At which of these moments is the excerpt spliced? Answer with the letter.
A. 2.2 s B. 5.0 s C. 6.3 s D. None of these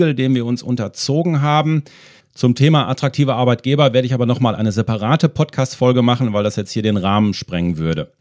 A